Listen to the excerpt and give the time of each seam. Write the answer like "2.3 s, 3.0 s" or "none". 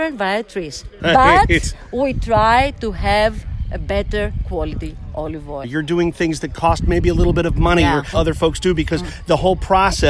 1.0 s, 5.6 s, 8.1 s